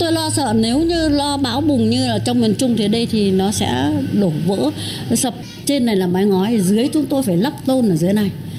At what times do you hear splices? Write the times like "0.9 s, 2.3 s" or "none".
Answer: none